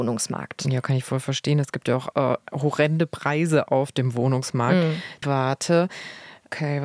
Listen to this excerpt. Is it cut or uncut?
cut